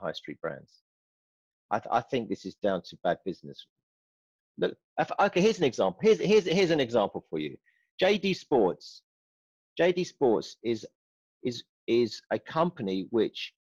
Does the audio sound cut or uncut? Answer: uncut